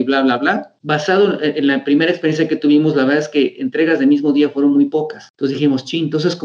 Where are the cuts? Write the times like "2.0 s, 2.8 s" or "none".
none

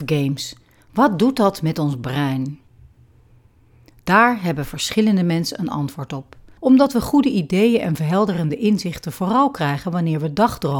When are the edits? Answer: 6.6 s

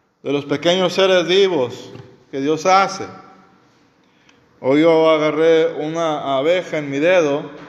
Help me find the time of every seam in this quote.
none

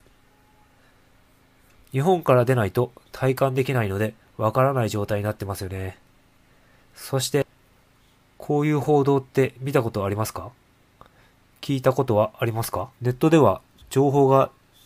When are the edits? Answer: 12.9 s

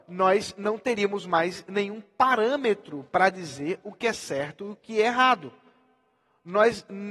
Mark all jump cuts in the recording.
none

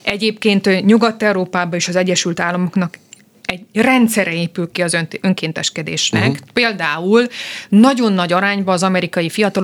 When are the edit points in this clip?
none

